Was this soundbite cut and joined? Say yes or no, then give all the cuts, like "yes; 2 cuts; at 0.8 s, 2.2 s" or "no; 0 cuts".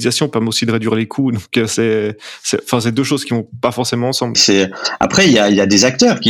yes; 1 cut; at 4.3 s